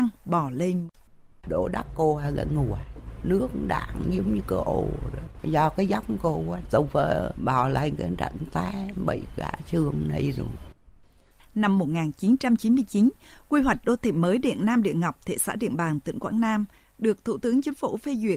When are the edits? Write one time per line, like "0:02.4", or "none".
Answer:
none